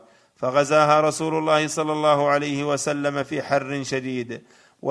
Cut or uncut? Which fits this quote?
uncut